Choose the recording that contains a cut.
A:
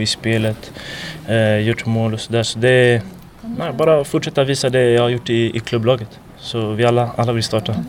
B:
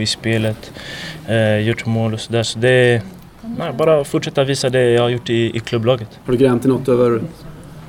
B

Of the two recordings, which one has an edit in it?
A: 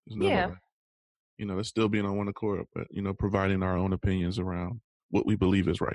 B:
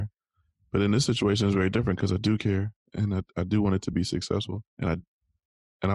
B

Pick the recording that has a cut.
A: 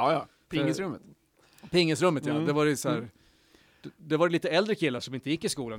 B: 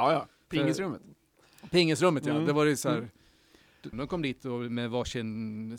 B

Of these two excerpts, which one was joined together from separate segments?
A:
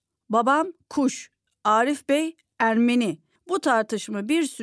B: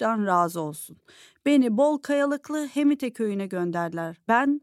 A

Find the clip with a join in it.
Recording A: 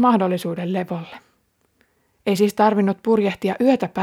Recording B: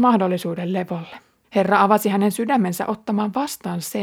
B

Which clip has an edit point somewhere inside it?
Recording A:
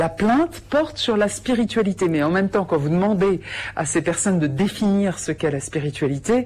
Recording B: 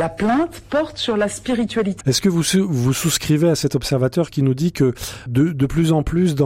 B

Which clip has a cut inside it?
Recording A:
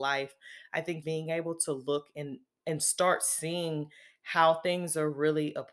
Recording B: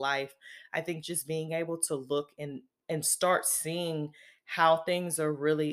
A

